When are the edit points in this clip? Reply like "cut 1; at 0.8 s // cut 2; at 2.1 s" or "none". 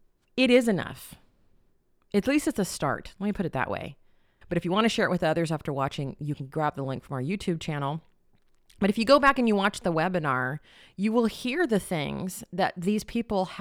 cut 1; at 4.4 s